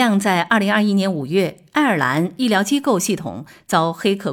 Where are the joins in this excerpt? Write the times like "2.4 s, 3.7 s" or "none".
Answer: none